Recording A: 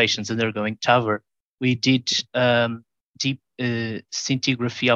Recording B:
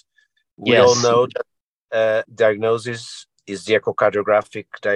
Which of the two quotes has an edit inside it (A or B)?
B